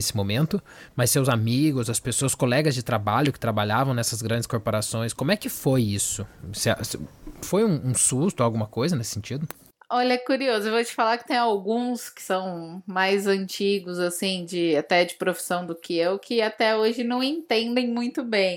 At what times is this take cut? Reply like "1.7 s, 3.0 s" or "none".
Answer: none